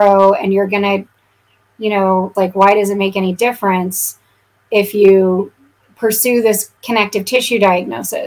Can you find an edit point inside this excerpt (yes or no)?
yes